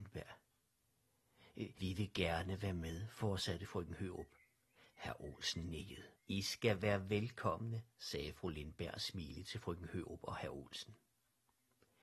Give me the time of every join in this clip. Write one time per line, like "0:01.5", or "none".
0:01.8
0:06.2